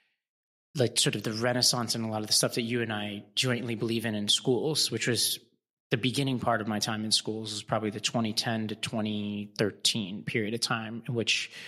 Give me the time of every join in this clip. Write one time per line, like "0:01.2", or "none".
none